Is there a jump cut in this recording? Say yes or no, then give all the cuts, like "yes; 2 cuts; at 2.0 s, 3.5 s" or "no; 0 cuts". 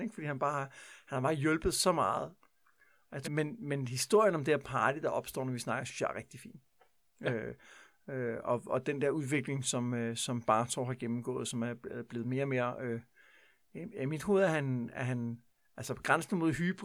yes; 1 cut; at 3.2 s